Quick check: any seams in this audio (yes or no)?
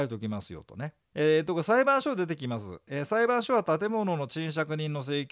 yes